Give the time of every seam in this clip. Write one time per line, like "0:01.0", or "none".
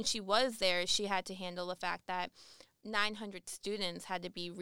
none